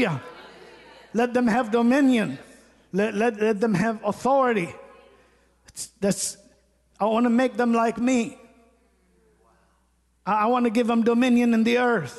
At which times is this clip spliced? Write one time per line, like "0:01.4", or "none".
0:03.4